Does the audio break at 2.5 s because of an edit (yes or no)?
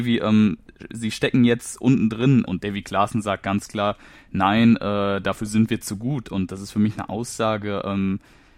yes